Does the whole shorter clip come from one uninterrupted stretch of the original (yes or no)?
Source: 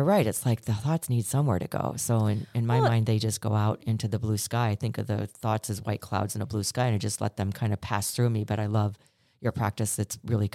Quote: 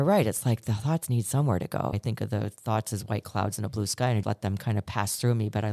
no